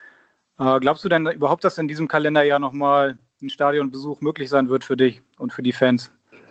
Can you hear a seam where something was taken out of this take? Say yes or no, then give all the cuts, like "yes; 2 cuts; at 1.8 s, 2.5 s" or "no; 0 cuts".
no; 0 cuts